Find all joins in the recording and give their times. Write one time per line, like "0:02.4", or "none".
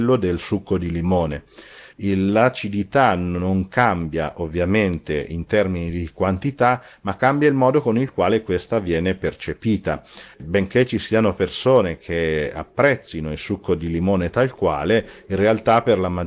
0:01.9
0:10.3